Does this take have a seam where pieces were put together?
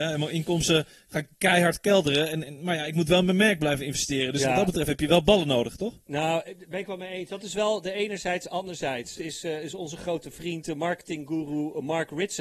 yes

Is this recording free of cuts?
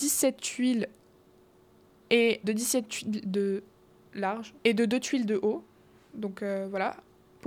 no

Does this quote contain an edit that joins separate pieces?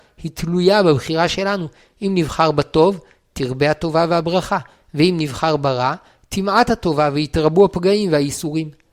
no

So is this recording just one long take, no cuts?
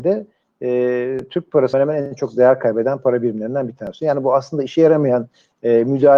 no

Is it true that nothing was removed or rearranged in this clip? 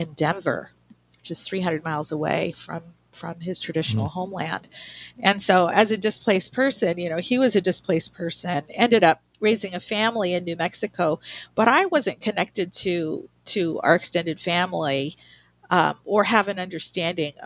yes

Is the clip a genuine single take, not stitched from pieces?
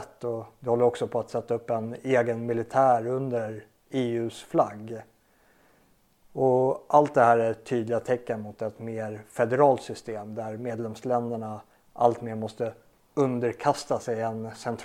yes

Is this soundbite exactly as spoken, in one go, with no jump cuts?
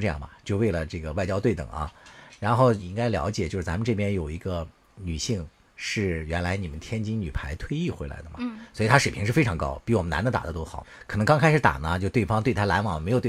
yes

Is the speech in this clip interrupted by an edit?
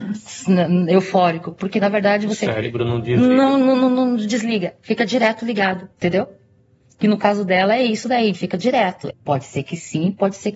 yes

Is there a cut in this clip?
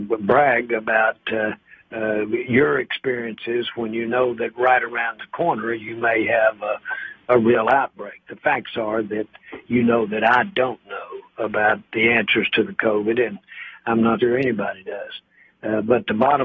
yes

